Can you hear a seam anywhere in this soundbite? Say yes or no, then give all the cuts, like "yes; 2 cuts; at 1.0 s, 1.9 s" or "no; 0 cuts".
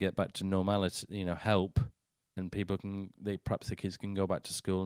no; 0 cuts